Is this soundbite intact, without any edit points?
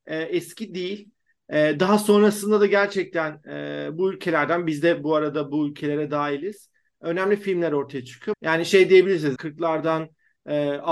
no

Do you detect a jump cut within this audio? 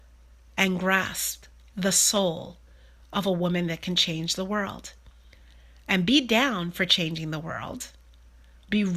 no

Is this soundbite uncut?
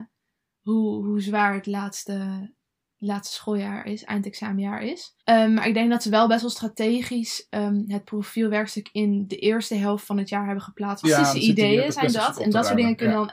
no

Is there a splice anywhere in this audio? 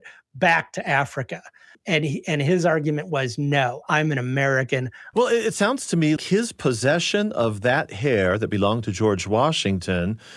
yes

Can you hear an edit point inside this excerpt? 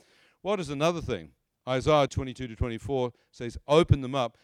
yes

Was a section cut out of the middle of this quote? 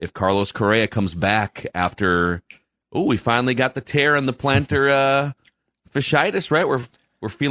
no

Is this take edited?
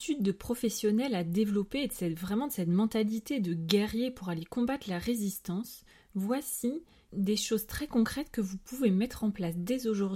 no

